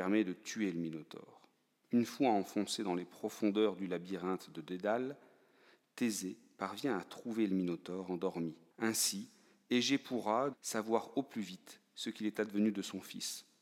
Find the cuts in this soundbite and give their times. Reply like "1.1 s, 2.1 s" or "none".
8.7 s, 10.5 s